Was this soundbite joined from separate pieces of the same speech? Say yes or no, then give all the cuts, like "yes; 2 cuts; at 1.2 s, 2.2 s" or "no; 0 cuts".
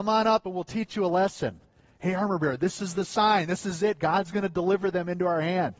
no; 0 cuts